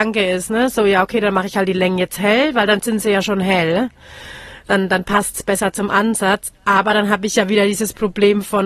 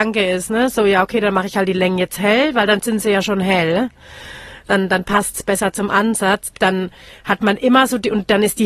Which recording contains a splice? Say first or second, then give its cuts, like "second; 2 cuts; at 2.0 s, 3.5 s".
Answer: second; 1 cut; at 6.5 s